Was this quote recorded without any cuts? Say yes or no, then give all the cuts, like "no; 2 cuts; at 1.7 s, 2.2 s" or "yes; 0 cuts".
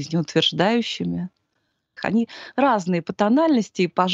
no; 1 cut; at 2.0 s